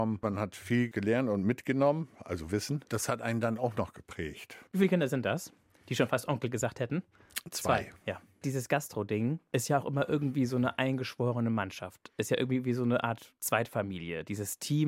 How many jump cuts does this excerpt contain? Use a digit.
1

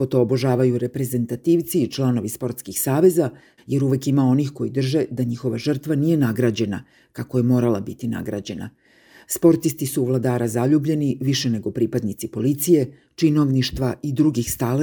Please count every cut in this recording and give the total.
1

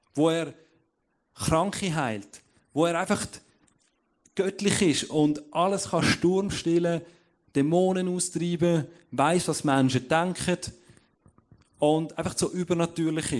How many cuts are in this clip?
0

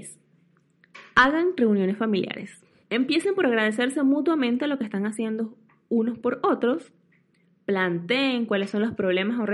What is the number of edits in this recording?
1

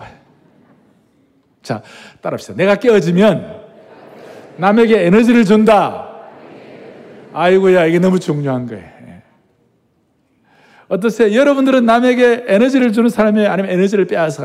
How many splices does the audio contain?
0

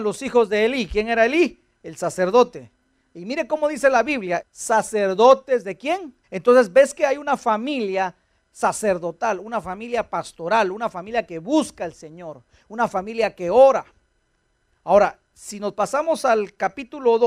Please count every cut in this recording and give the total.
2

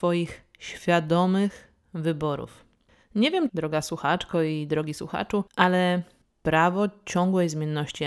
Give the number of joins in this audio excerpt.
2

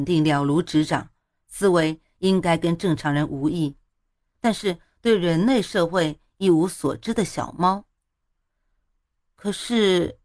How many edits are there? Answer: 1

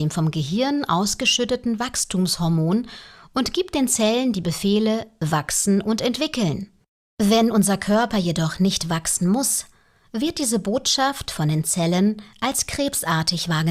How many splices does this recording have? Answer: 0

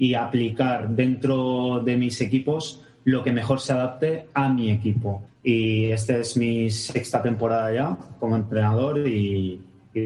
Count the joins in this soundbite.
1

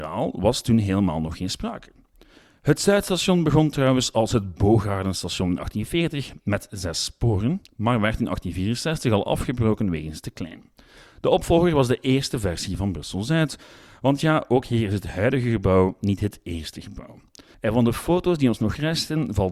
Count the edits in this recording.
1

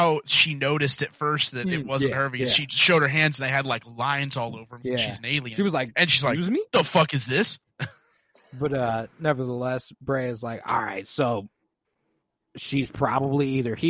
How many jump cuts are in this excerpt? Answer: 0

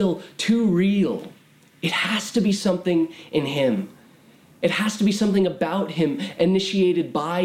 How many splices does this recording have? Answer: 0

